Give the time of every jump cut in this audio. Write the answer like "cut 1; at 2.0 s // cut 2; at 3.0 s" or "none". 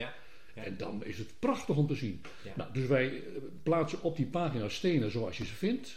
none